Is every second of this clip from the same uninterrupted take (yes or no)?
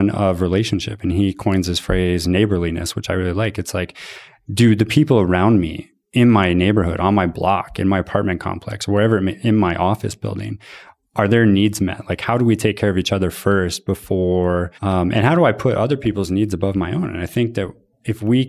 no